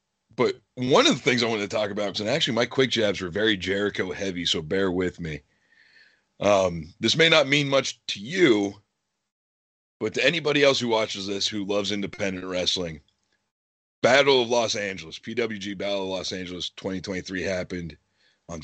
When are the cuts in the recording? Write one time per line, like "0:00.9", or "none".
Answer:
0:02.1